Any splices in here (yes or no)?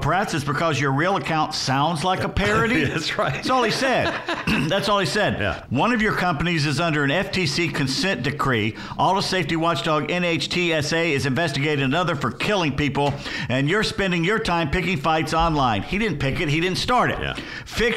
yes